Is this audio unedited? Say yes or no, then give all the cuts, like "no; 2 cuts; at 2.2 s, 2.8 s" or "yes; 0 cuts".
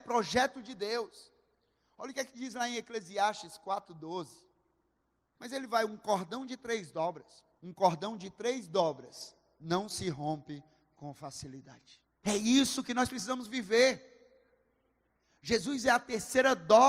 no; 3 cuts; at 5.4 s, 7.6 s, 12.2 s